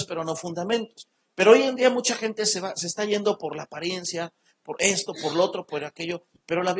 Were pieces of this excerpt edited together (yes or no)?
no